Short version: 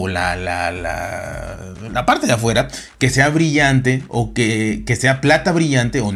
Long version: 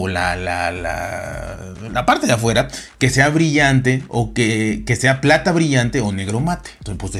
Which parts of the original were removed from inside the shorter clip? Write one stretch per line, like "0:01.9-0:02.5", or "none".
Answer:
none